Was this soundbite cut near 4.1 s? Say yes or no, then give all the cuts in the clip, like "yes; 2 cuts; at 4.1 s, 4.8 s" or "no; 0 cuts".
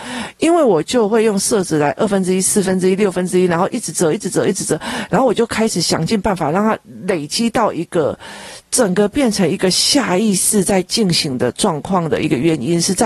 no; 0 cuts